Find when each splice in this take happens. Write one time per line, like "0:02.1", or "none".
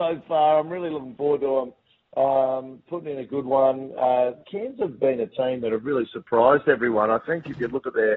none

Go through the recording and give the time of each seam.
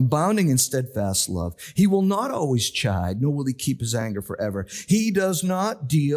none

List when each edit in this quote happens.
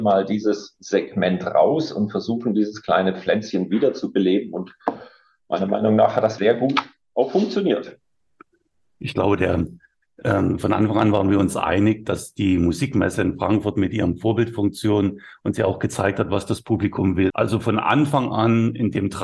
0:06.4
0:17.3

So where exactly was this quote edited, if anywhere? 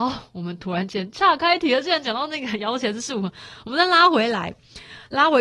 none

